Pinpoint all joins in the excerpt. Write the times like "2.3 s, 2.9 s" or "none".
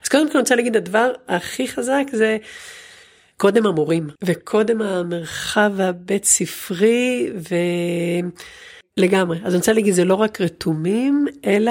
4.2 s, 8.8 s

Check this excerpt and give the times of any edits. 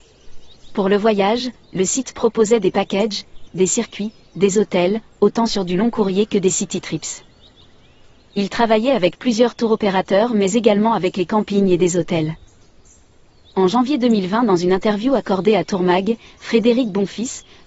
3.5 s

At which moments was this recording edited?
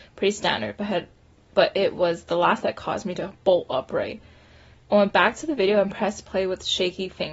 4.7 s

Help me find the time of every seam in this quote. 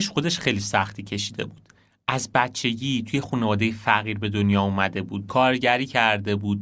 5.3 s

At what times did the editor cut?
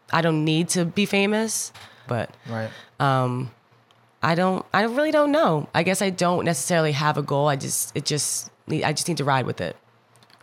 2.1 s

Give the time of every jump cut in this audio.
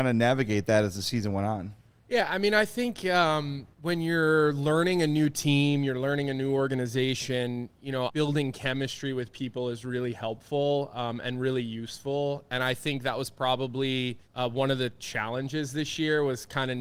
3.7 s, 8.1 s, 14.2 s

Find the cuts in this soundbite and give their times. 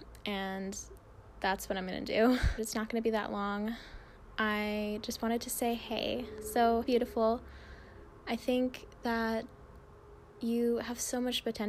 2.6 s, 6.8 s

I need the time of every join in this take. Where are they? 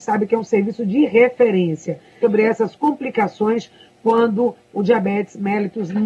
2.2 s

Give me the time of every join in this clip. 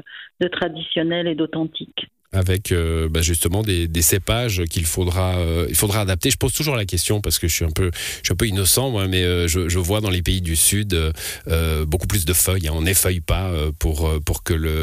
none

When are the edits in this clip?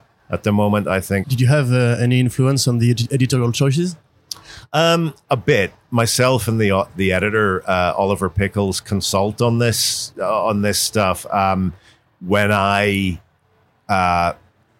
1.2 s

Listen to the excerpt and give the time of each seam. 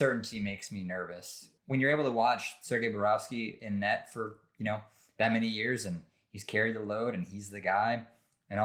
1.6 s

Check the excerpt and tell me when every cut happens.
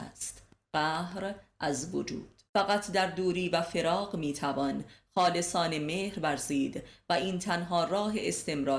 2.5 s

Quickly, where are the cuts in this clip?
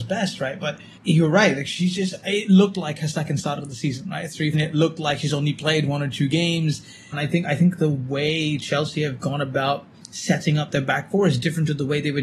1.0 s, 4.5 s, 7.1 s

